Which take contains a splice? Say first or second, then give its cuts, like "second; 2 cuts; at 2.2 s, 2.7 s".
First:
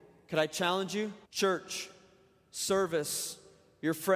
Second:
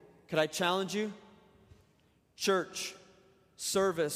first; 1 cut; at 1.2 s